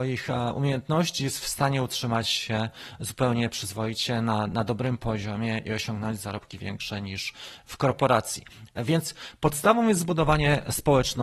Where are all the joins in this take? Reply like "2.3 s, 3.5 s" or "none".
none